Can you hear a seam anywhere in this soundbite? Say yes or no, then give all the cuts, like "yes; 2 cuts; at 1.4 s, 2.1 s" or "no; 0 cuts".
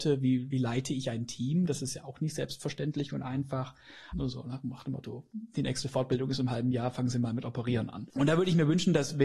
yes; 2 cuts; at 4.1 s, 5.3 s